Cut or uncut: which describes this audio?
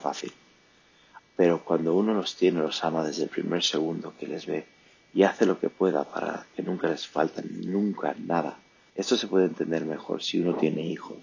cut